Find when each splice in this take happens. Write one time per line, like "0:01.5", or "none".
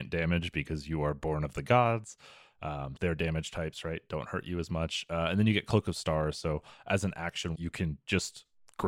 0:03.0
0:07.5